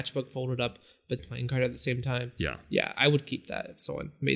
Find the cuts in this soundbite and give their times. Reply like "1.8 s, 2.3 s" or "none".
1.2 s